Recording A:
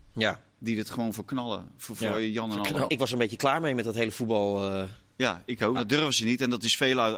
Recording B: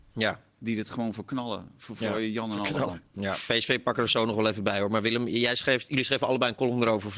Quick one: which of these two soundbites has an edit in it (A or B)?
A